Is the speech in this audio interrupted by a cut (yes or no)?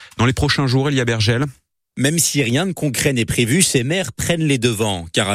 no